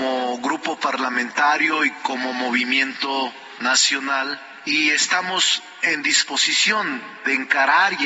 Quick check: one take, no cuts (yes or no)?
yes